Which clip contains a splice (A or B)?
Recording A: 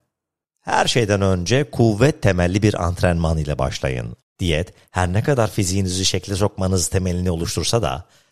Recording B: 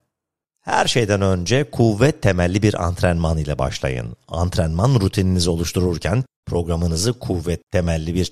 A